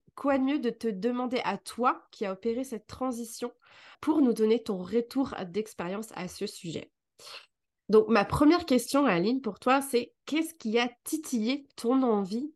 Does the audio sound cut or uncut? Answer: uncut